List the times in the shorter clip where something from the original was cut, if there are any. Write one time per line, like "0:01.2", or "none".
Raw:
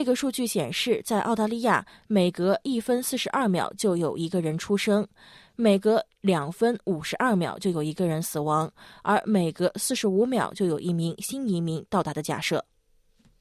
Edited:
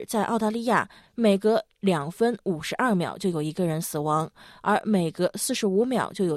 0:01.0